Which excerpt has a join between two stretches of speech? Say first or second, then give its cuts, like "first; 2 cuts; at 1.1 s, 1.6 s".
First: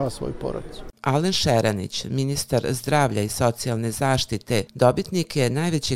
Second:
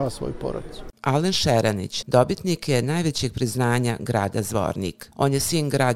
second; 1 cut; at 2.0 s